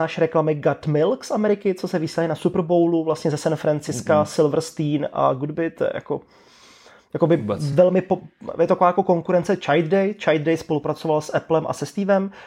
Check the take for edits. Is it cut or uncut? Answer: uncut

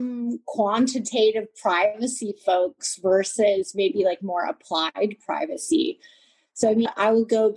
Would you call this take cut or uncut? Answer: uncut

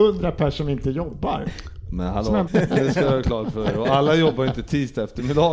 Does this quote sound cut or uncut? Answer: cut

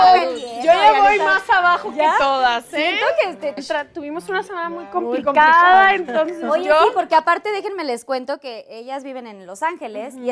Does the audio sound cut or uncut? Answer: cut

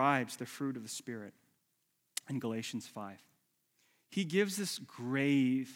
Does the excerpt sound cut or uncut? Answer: uncut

